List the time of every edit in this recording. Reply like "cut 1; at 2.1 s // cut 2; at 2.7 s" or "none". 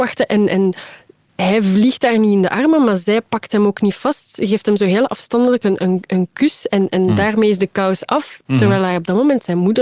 none